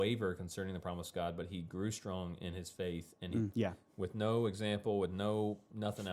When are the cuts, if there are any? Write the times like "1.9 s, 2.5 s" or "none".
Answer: 3.5 s